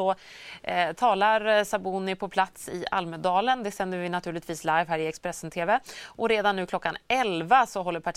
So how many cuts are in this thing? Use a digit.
0